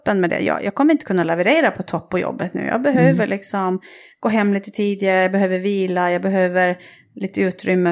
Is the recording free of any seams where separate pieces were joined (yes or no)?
yes